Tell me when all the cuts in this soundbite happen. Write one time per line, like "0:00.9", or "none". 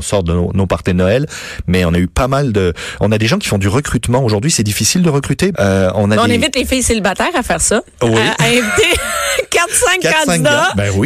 0:05.5